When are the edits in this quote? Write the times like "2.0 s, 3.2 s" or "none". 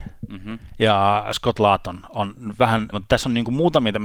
2.9 s